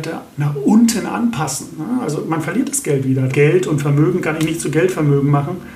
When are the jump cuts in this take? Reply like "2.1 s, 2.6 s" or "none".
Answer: 3.3 s